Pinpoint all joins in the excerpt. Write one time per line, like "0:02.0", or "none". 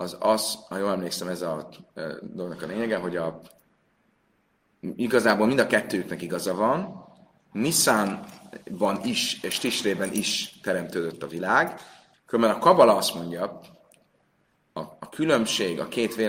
0:12.1
0:14.5